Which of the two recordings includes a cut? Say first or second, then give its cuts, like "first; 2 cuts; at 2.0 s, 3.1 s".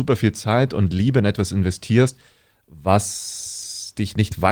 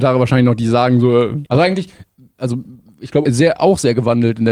second; 2 cuts; at 1.4 s, 3.2 s